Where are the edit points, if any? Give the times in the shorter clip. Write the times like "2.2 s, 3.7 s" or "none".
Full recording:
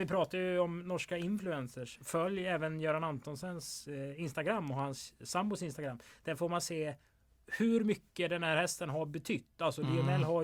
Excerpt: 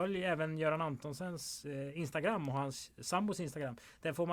none